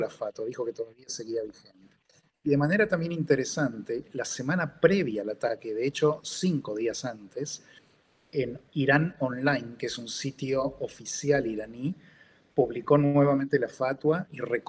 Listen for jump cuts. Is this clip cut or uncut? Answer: uncut